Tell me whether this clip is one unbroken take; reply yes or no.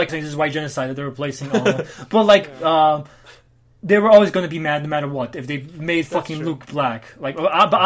yes